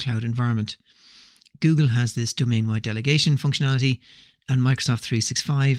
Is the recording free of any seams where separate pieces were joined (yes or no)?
yes